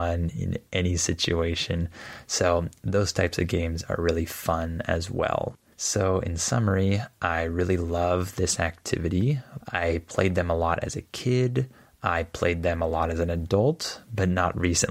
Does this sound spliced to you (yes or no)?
yes